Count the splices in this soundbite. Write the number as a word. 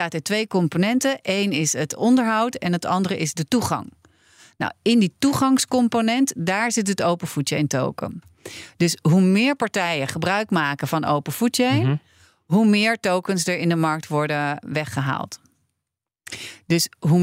zero